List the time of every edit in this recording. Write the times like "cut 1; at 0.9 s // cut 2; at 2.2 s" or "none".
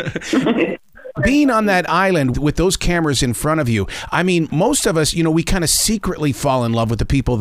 cut 1; at 2.3 s

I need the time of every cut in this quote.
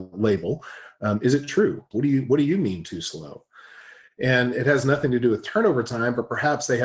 cut 1; at 1.9 s

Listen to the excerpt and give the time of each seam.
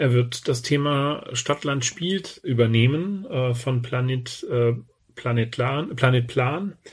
none

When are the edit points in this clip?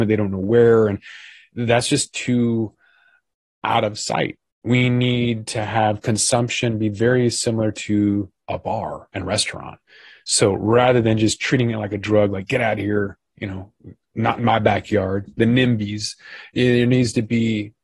none

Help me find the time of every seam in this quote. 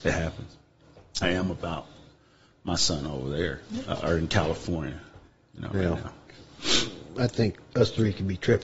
cut 1; at 1.2 s

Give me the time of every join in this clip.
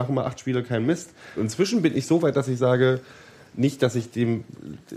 cut 1; at 1.4 s

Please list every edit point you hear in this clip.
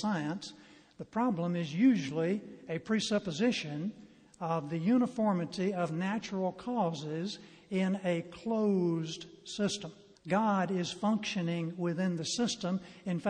cut 1; at 10.2 s

